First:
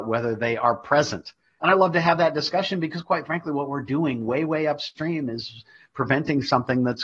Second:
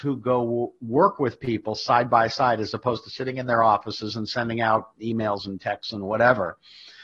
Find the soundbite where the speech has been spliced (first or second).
first